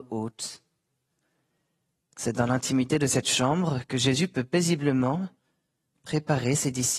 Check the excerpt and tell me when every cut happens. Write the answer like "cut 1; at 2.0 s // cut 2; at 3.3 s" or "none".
none